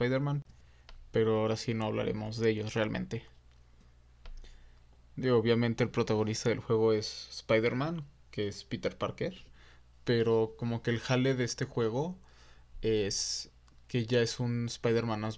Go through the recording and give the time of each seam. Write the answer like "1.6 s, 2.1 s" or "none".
none